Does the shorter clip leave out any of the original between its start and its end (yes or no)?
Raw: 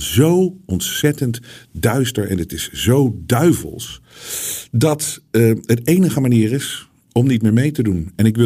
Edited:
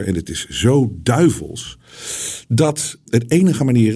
yes